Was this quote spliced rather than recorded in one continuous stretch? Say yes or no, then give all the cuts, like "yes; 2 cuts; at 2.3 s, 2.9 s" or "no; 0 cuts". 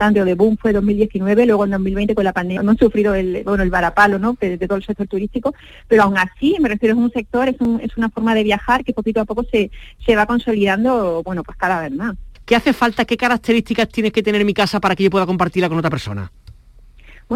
yes; 1 cut; at 2.6 s